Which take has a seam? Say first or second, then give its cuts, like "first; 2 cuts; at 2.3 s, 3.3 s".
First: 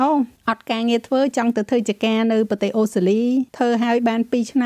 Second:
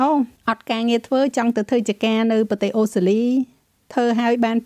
first; 1 cut; at 3.5 s